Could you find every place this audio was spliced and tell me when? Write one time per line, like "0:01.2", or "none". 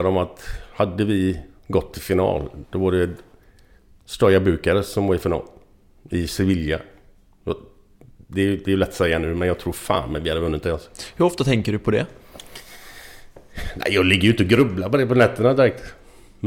none